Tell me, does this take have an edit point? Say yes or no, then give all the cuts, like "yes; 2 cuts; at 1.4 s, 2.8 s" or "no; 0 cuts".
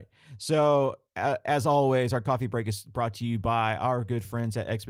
no; 0 cuts